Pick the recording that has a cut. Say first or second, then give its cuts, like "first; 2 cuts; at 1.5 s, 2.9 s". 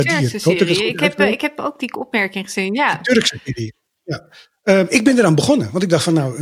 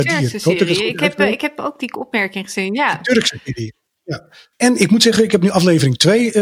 second; 1 cut; at 4.5 s